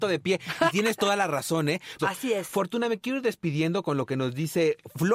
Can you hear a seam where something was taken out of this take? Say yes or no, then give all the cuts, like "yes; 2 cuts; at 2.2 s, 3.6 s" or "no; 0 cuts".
yes; 1 cut; at 2.0 s